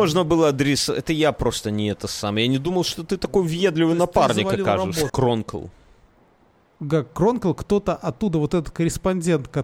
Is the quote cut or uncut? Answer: cut